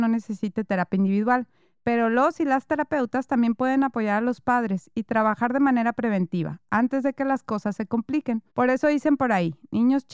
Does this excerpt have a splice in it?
yes; 1 cut; at 8.5 s

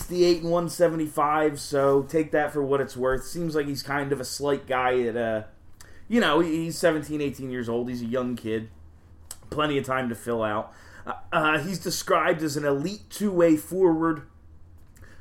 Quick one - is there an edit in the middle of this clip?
no; 0 cuts

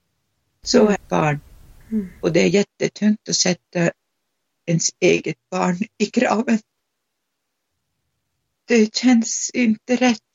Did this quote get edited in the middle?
yes; 1 cut; at 1.0 s

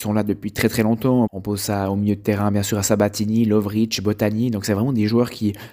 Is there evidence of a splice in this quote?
yes; 1 cut; at 1.3 s

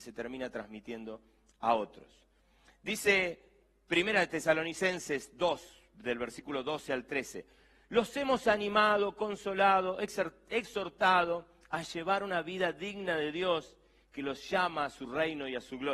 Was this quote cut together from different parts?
no; 0 cuts

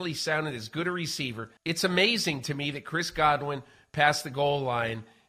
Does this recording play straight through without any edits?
no; 1 cut; at 1.6 s

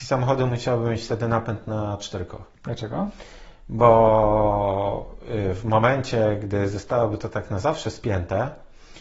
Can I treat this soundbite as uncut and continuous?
no; 1 cut; at 2.5 s

